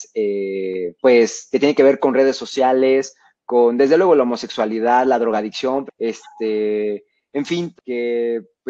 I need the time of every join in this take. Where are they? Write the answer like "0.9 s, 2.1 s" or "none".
1.0 s, 5.9 s, 7.8 s